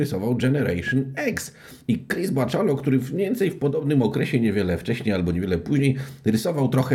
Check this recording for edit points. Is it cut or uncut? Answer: uncut